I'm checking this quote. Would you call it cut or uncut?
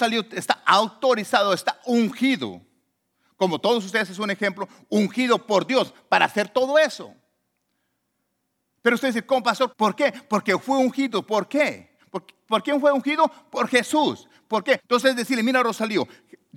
cut